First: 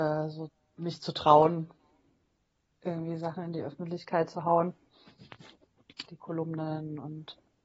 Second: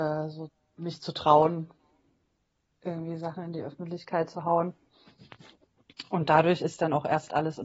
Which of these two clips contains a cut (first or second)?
first